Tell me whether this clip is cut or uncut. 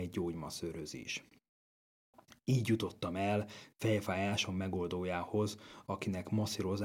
uncut